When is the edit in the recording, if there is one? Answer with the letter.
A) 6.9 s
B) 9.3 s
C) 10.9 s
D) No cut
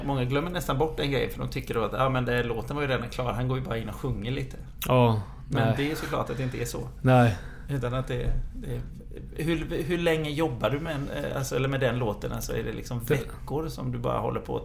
D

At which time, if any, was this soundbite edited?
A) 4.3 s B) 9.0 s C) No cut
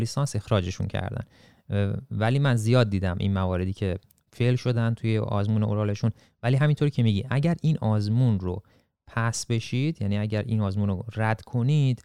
A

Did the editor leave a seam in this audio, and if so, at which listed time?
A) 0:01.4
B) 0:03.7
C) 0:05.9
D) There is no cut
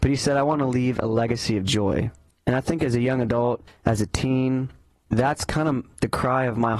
B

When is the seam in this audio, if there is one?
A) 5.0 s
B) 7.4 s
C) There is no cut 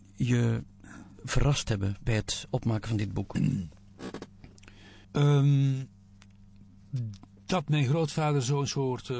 A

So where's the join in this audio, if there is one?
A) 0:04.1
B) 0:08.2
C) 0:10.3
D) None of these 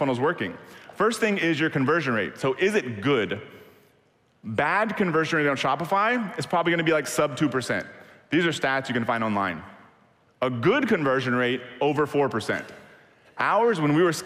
C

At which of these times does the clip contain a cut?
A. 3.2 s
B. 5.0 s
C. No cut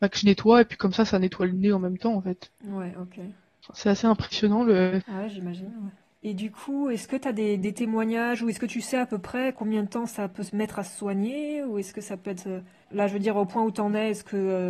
B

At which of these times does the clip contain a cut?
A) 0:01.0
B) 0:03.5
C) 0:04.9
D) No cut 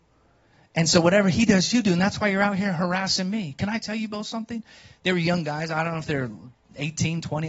D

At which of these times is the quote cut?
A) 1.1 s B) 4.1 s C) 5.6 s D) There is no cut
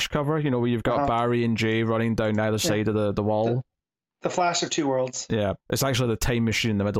C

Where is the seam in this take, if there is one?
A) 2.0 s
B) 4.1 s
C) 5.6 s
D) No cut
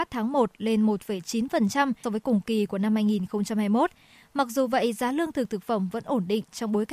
A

